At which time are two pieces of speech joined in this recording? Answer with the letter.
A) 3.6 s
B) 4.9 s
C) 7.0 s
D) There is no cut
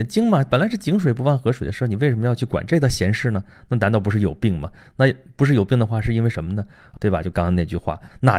C